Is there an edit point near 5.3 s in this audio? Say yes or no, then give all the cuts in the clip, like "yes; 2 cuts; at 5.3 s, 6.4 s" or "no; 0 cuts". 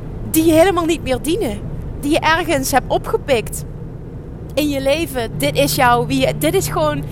yes; 1 cut; at 5.3 s